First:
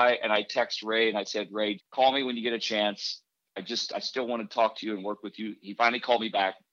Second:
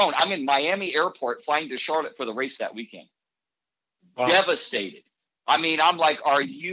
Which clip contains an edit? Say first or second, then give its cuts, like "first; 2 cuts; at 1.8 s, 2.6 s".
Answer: first; 1 cut; at 1.8 s